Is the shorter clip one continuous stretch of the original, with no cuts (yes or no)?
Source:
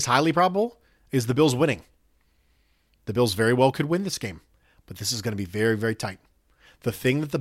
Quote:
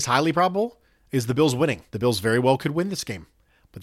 no